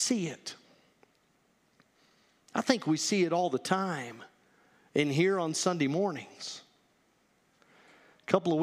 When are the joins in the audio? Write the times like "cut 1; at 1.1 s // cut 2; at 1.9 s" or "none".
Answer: none